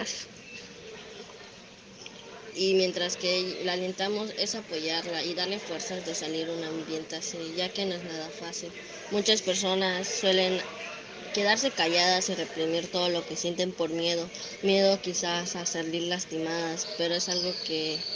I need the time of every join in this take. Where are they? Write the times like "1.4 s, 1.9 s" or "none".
2.5 s